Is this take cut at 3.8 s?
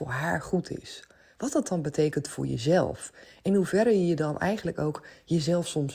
no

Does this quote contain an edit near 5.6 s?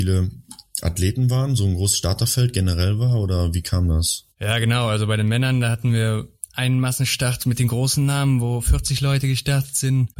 no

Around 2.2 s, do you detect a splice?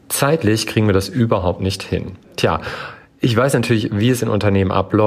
yes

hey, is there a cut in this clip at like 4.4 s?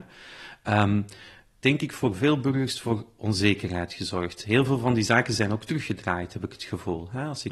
no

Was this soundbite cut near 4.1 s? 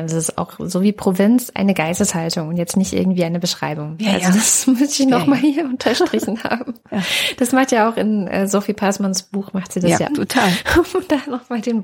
no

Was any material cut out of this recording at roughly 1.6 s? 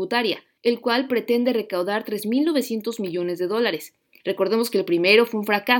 no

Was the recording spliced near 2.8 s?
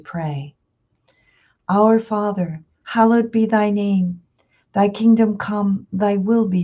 yes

